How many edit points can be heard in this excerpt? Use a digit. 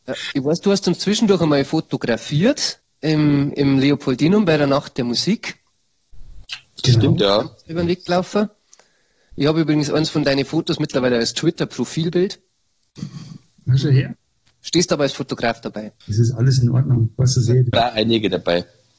2